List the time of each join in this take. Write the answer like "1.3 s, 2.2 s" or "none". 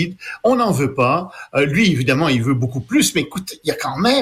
none